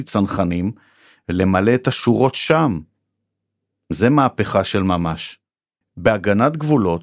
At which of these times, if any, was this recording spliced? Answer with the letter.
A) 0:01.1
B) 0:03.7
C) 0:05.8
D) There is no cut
C